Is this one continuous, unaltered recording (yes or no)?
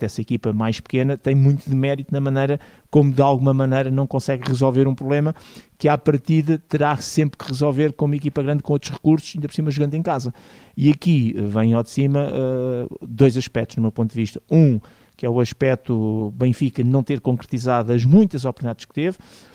yes